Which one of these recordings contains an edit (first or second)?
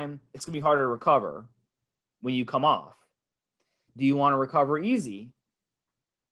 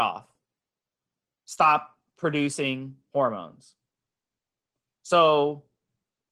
first